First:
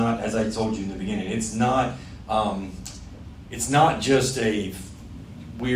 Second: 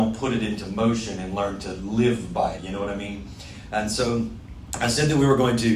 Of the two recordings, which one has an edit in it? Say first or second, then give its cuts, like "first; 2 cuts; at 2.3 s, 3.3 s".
second; 1 cut; at 2.6 s